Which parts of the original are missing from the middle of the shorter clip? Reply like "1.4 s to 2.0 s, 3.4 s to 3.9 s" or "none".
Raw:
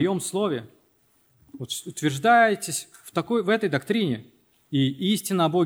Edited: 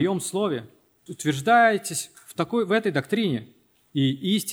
1.1 s to 1.8 s